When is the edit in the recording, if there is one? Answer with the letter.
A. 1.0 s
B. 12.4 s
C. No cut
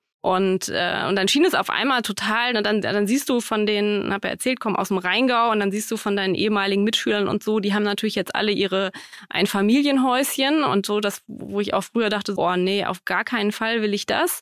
B